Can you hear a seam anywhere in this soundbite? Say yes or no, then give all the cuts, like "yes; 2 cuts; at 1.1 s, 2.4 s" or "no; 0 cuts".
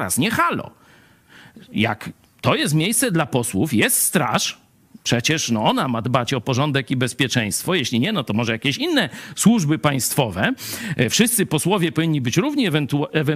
no; 0 cuts